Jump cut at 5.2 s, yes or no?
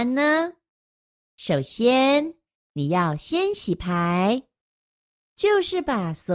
yes